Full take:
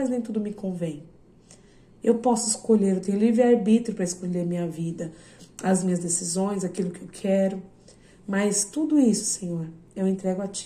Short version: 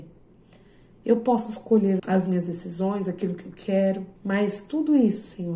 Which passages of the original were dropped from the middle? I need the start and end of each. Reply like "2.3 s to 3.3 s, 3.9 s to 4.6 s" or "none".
3.0 s to 5.5 s, 7.7 s to 8.2 s